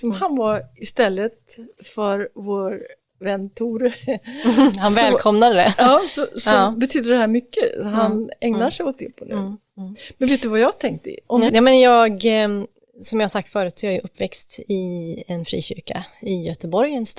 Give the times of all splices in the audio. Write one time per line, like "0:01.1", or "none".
0:11.5